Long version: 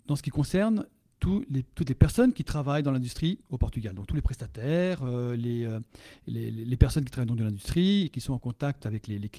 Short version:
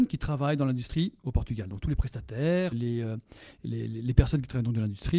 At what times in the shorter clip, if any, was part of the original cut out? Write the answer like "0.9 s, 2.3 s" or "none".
2.7 s